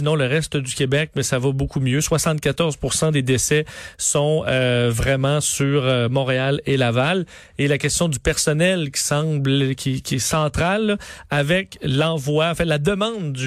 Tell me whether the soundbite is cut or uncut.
uncut